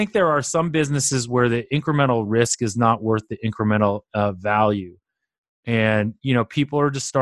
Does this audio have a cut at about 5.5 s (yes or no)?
no